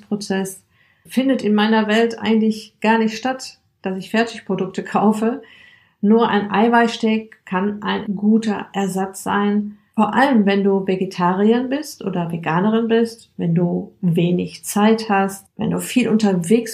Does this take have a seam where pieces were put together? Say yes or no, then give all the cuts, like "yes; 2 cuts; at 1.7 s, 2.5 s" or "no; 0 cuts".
yes; 1 cut; at 1.1 s